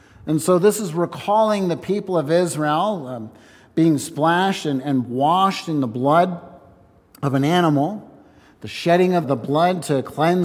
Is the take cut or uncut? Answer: cut